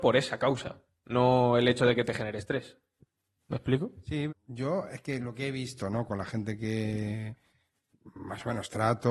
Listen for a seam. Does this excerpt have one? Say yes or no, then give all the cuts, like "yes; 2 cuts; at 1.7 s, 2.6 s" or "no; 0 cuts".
yes; 1 cut; at 4.3 s